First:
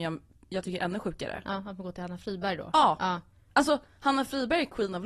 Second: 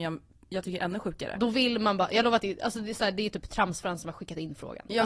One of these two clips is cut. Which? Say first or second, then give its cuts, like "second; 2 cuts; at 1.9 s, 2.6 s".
second; 1 cut; at 1.4 s